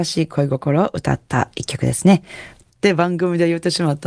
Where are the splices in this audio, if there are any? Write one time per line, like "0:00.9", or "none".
0:02.6